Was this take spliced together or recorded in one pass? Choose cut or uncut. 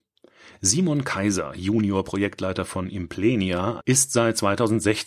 cut